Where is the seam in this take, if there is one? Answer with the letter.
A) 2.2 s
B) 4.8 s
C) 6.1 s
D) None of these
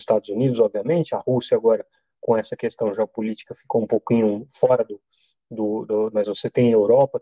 C